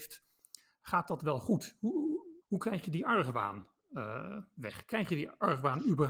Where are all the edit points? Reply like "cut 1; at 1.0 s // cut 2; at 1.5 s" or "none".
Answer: cut 1; at 2.4 s